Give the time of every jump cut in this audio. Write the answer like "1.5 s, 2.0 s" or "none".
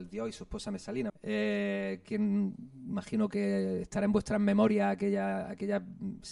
1.1 s

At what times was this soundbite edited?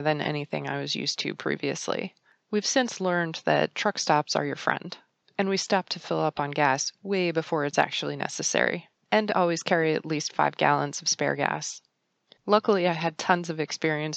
12.4 s

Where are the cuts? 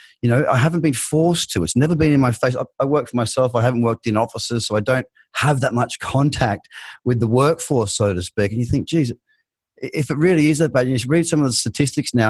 none

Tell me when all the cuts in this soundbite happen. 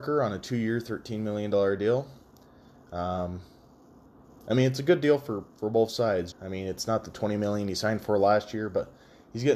6.3 s

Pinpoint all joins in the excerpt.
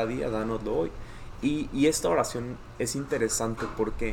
2.7 s

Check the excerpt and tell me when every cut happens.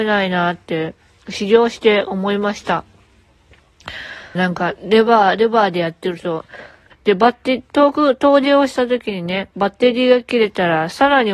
4.4 s, 6.9 s

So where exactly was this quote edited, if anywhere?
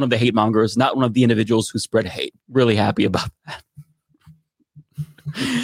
2.4 s

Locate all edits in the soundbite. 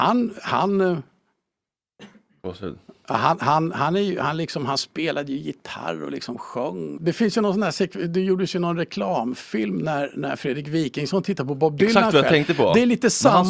7.0 s

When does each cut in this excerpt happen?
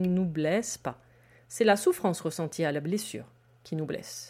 none

